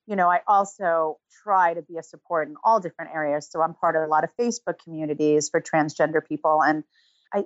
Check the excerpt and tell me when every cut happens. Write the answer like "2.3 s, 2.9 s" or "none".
none